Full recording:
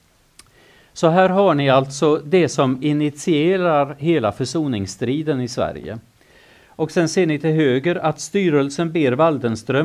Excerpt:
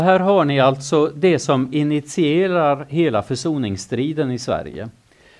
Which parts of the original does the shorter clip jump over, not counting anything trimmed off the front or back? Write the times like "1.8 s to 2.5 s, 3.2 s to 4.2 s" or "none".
none